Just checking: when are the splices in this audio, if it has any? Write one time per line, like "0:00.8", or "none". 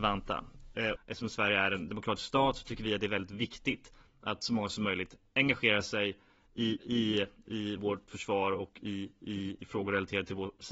0:01.0
0:06.8